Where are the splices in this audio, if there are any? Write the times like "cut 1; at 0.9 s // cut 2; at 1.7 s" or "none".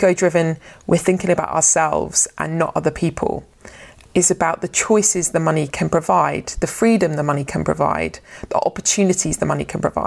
cut 1; at 4.0 s